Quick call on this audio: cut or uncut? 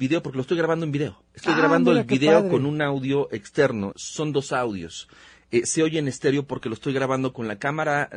cut